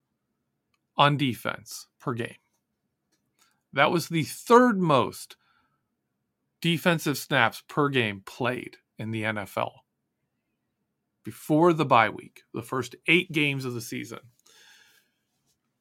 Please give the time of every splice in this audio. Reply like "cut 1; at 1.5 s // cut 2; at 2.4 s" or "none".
cut 1; at 1.9 s